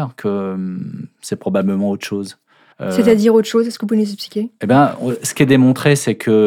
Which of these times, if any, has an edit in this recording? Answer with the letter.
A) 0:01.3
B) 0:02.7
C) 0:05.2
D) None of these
B